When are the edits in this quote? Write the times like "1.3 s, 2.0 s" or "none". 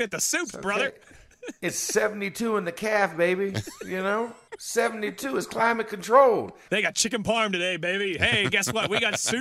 4.5 s, 6.7 s